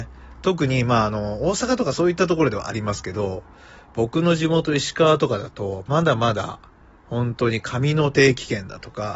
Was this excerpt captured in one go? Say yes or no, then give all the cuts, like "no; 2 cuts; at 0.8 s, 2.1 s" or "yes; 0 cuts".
yes; 0 cuts